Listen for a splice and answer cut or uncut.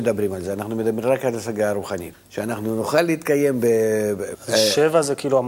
cut